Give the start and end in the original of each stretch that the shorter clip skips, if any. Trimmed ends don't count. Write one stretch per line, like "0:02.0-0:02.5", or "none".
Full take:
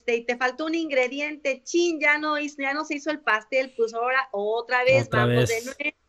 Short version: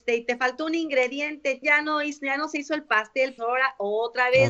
0:01.6-0:02.0
0:03.7-0:03.9